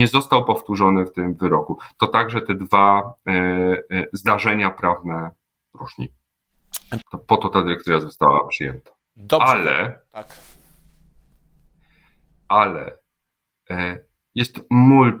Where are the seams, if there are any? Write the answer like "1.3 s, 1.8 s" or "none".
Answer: 7.0 s